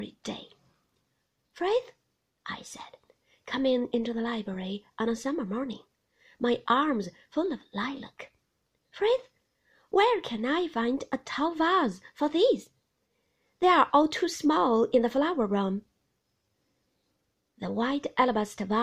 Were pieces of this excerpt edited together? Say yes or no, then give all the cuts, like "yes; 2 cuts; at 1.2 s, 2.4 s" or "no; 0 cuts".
no; 0 cuts